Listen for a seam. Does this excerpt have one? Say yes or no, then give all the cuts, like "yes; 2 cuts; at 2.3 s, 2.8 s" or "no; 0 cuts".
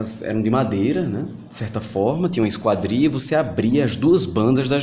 no; 0 cuts